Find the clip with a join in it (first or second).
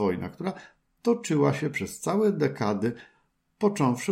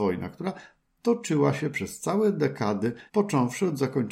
second